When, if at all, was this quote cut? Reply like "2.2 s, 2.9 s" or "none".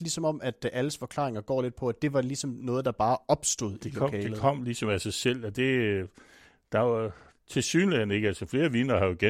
none